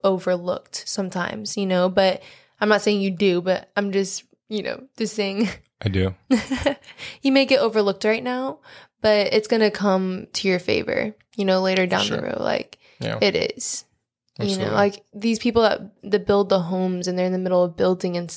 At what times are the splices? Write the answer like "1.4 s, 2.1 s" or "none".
none

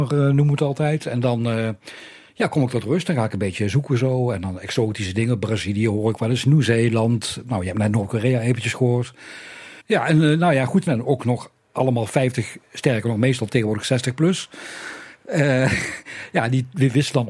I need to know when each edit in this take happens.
9.8 s, 10.9 s

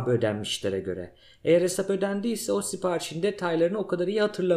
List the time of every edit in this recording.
none

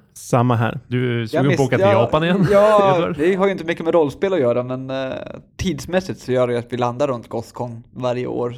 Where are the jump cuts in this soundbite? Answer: none

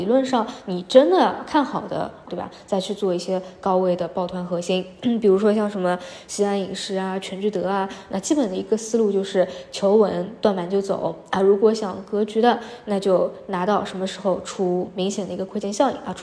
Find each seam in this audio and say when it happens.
2.3 s

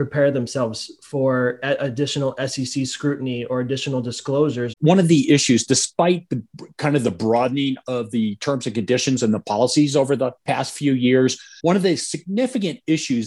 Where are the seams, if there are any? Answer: 4.7 s, 10.4 s, 11.6 s

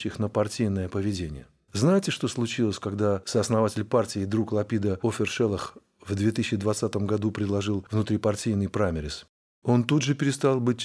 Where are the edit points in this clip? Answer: none

